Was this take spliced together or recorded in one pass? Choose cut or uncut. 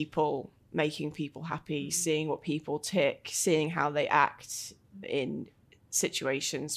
cut